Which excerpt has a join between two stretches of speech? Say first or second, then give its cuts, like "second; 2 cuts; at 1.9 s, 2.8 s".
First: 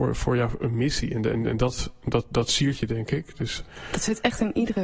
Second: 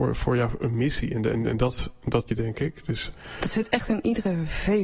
second; 1 cut; at 2.3 s